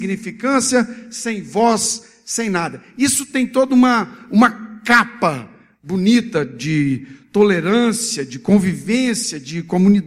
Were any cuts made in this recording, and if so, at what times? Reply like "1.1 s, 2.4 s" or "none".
none